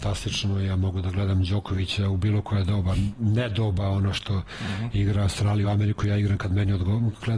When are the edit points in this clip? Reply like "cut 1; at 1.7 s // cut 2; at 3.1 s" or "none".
none